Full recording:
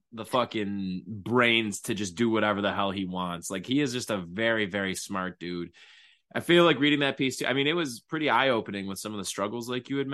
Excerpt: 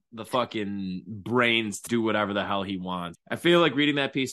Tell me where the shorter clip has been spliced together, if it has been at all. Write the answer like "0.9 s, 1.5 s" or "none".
1.9 s, 3.1 s